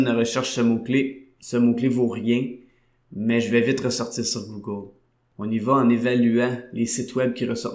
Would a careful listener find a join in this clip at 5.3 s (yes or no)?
yes